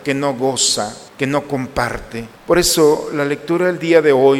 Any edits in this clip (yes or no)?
yes